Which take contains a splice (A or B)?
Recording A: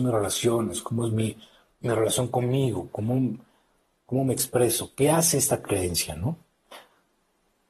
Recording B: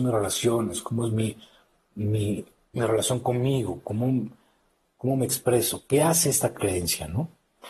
A